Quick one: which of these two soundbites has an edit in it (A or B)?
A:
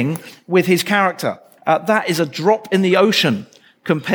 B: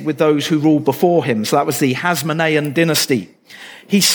A